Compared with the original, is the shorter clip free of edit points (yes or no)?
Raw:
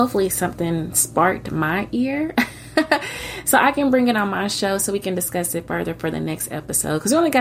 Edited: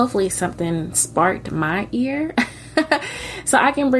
yes